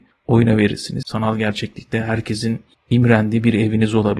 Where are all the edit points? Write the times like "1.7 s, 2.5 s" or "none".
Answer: 1.0 s